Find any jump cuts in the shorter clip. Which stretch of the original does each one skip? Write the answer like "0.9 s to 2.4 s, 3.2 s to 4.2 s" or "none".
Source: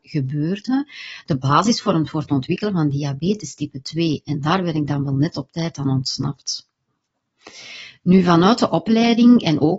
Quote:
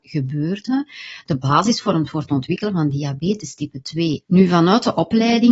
4.2 s to 8.0 s